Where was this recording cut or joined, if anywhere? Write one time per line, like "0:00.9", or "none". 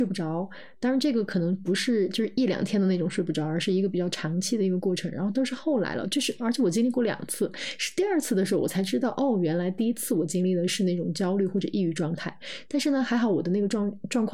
none